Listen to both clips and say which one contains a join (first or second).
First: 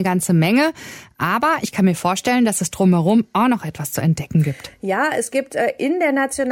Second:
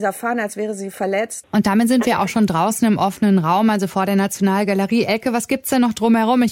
second